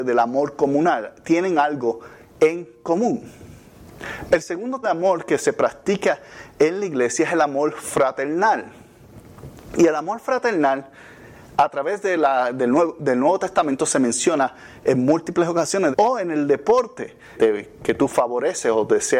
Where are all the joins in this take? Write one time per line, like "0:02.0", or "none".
0:04.8
0:15.9
0:17.3